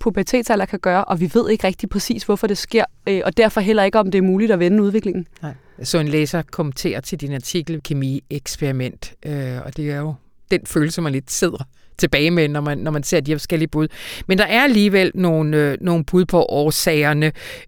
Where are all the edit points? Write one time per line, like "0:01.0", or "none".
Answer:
0:07.8

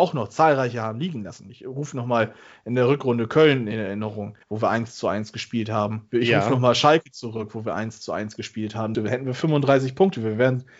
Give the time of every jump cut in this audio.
0:04.4
0:08.9

